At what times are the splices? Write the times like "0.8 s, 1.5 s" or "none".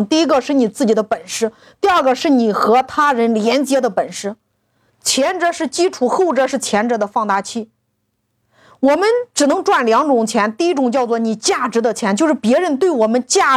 none